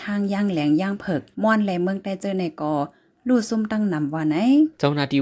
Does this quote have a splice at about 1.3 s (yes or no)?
yes